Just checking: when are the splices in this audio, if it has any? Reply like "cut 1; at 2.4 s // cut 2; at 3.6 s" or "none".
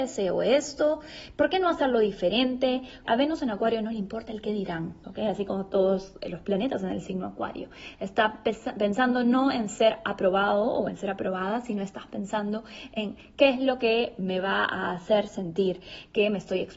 cut 1; at 3.1 s // cut 2; at 5.0 s